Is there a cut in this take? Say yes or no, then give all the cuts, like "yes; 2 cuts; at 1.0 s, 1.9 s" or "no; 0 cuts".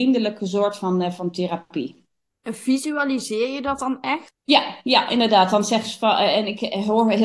no; 0 cuts